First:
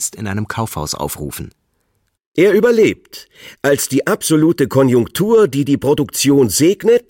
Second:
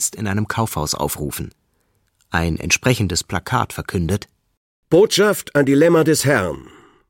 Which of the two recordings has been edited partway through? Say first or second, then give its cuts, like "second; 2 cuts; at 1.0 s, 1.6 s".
first; 1 cut; at 2.1 s